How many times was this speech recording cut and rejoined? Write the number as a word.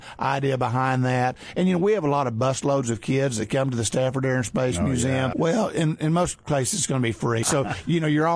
two